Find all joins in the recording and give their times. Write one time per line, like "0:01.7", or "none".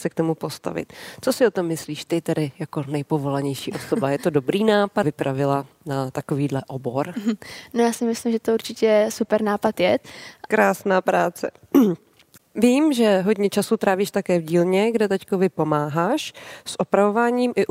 0:05.0
0:10.5